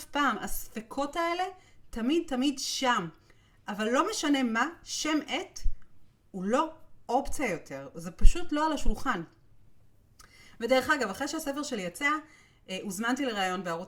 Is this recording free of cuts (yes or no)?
yes